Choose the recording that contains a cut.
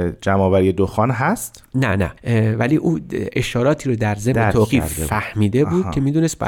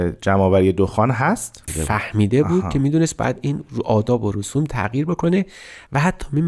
second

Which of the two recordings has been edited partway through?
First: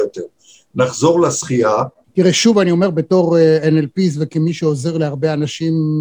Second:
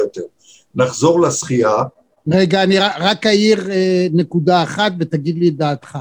first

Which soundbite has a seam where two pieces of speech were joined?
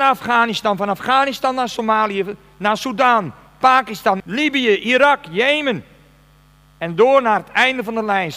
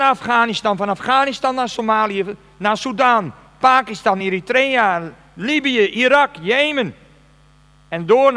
first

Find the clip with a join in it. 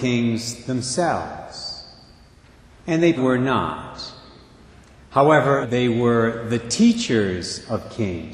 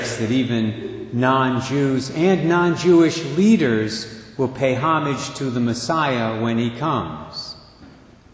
first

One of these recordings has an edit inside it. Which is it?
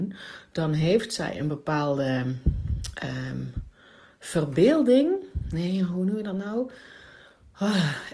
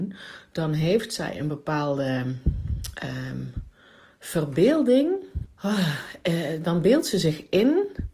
second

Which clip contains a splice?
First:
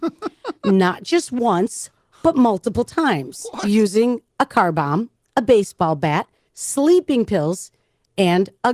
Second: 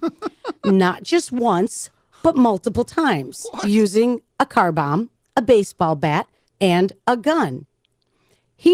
second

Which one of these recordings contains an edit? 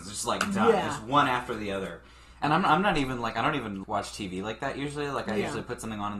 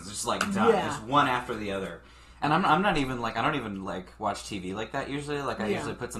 first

